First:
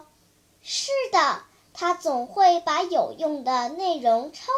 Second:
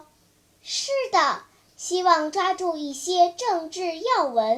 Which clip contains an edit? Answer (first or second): second